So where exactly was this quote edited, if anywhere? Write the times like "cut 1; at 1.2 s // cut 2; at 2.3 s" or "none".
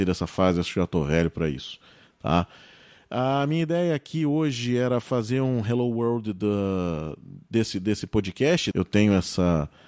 none